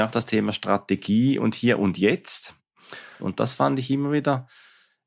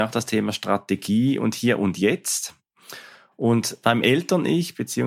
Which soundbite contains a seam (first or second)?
first